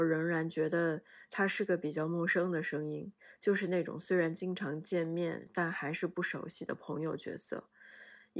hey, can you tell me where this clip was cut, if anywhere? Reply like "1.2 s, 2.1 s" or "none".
none